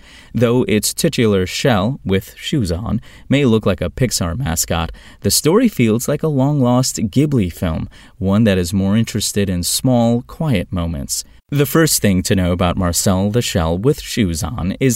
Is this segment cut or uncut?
cut